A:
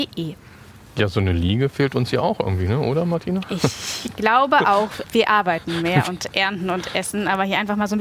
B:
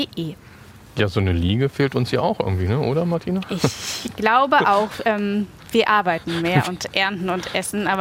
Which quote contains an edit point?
A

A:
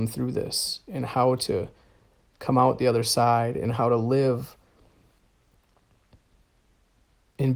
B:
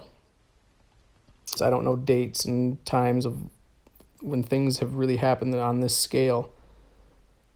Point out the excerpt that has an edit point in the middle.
B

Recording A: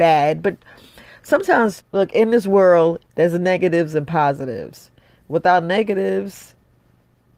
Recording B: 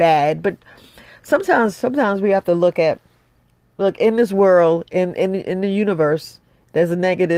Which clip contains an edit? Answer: A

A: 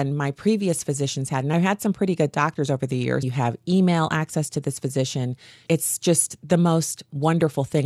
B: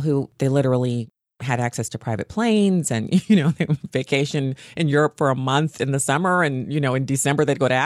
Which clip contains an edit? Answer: A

